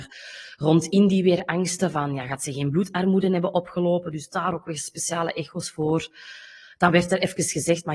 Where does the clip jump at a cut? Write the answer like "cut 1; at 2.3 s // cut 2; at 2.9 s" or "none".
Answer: none